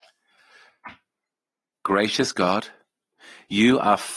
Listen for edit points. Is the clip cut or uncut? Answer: cut